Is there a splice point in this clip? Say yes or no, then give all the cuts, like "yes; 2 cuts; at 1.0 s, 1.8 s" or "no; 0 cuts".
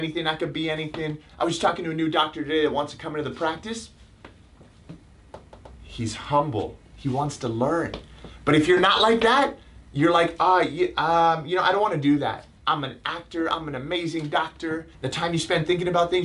yes; 3 cuts; at 1.3 s, 12.6 s, 14.9 s